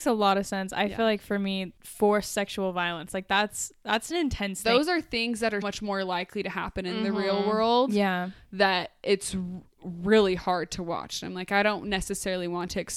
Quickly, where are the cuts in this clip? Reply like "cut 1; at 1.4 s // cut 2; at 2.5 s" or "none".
cut 1; at 5.6 s